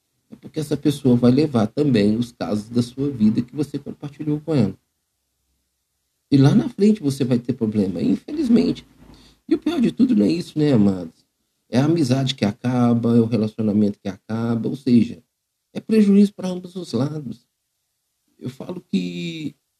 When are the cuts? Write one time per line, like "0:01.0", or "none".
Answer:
none